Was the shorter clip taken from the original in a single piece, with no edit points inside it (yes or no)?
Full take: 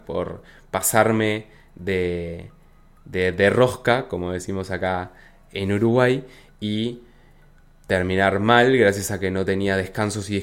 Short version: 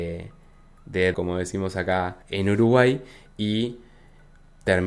no